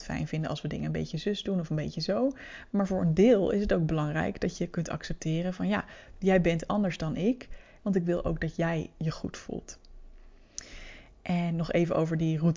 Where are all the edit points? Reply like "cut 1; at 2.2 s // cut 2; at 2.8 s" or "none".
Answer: cut 1; at 7.8 s